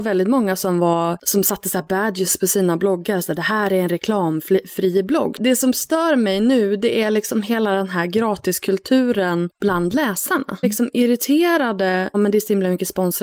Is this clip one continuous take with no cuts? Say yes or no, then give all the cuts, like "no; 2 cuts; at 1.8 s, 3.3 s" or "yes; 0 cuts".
no; 2 cuts; at 10.6 s, 12.1 s